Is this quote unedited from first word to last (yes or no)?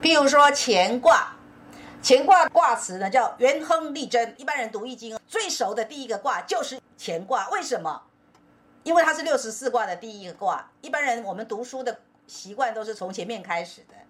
yes